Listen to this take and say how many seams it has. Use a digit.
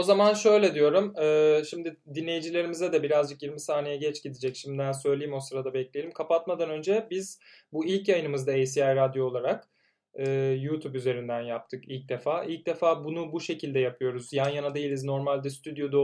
0